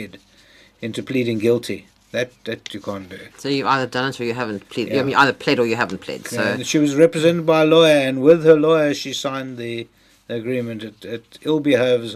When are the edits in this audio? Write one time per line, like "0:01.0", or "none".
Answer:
none